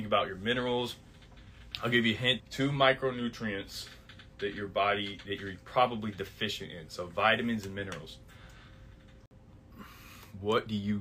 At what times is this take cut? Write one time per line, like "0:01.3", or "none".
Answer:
0:02.4

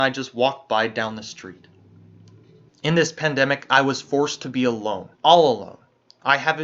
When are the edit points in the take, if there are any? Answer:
0:02.7
0:05.1

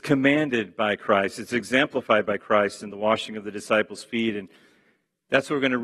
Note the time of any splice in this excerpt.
none

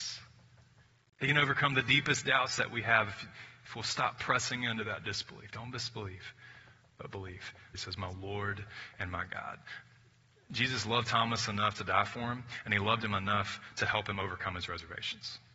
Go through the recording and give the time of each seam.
0:07.7

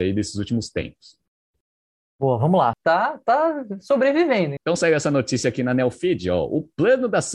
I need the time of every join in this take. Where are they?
0:02.7
0:04.6

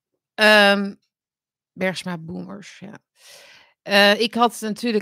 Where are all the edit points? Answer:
none

